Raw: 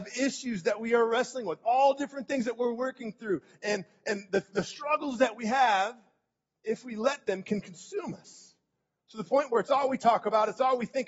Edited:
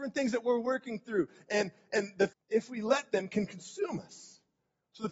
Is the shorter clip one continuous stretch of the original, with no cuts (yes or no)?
no